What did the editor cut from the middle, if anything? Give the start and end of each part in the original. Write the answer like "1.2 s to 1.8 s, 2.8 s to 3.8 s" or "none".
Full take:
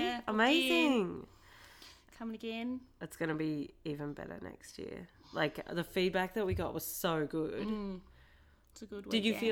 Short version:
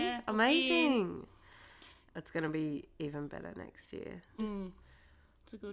2.1 s to 2.9 s, 5.2 s to 7.7 s